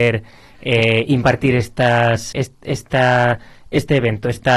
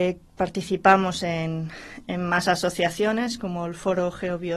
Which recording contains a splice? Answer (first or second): first